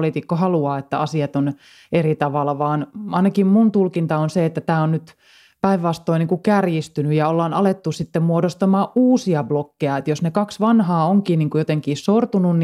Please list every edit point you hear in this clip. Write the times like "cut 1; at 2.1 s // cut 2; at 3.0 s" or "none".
none

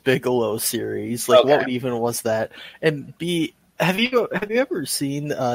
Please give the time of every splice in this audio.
none

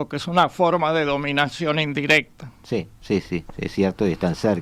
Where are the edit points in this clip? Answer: cut 1; at 3.2 s

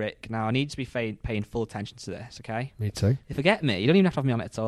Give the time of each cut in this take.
cut 1; at 3.2 s

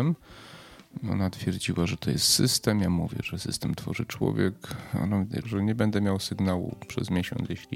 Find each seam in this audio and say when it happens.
cut 1; at 5.4 s

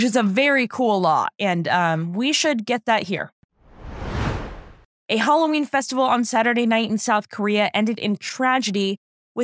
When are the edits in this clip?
none

